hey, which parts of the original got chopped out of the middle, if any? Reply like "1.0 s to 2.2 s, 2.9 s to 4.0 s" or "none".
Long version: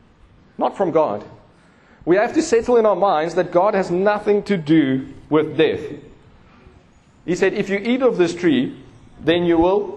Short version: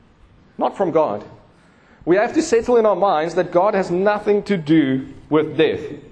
none